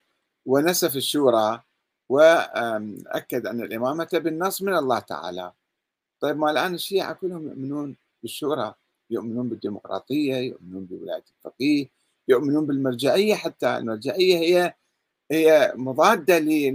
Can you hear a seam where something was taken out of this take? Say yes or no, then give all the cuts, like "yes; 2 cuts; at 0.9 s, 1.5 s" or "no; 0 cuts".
no; 0 cuts